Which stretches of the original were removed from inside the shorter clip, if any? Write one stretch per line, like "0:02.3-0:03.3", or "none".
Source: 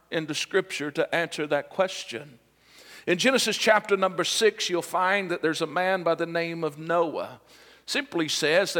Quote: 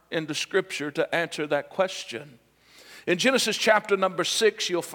none